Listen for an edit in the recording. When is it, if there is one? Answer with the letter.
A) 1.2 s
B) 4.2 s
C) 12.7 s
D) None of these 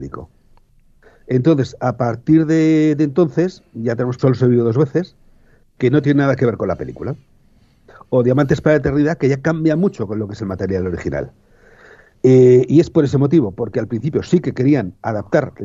B